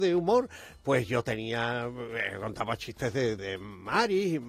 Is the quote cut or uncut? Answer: cut